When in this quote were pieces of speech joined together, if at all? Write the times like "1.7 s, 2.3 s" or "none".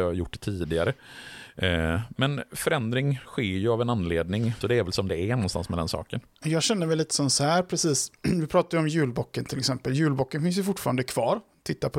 4.6 s